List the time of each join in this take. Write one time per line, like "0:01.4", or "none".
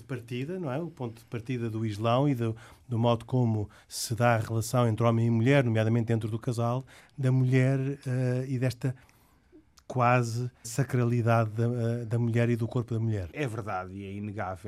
0:07.0
0:10.6
0:13.3